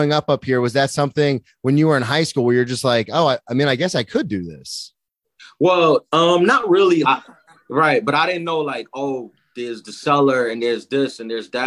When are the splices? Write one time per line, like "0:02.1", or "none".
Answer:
0:07.0